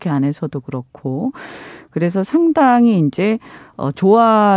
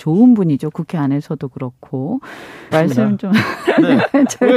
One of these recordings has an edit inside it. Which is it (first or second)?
second